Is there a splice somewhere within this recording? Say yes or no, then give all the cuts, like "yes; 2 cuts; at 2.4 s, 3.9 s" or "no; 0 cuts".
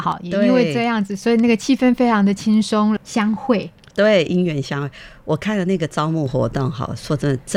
yes; 1 cut; at 3.0 s